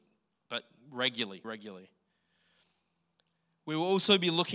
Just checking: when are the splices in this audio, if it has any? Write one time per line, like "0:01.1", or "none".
0:01.4